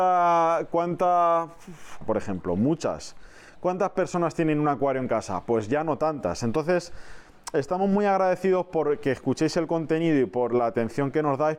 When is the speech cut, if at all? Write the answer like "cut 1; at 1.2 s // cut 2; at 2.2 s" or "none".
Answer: cut 1; at 2.0 s